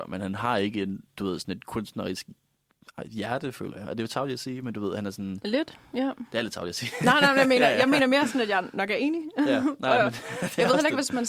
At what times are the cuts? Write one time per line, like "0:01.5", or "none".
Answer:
none